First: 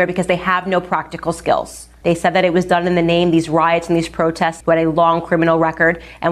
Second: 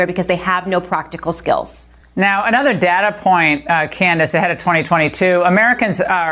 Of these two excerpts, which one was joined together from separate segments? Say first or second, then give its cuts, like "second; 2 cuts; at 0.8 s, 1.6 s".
first; 2 cuts; at 2.0 s, 4.6 s